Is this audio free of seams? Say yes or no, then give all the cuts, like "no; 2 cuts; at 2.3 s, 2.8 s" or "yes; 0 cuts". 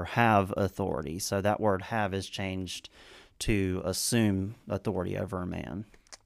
yes; 0 cuts